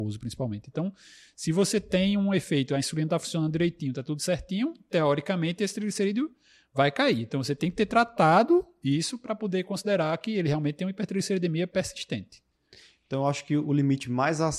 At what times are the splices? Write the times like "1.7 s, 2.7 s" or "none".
none